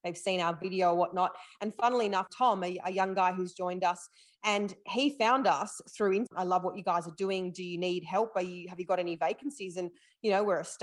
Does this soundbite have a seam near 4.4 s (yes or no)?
no